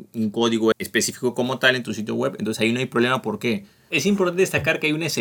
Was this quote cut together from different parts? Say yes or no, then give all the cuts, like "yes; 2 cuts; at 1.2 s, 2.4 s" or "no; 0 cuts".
yes; 1 cut; at 3.9 s